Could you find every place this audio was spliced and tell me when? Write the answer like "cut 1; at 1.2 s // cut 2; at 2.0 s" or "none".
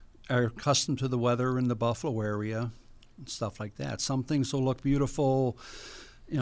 none

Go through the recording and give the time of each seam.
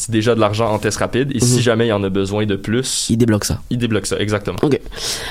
none

